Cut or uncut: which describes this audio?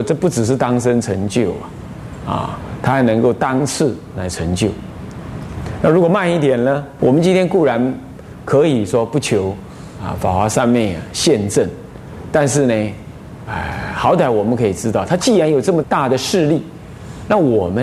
cut